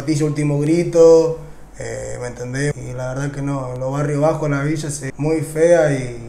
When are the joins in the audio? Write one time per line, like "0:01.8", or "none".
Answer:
0:02.7
0:05.1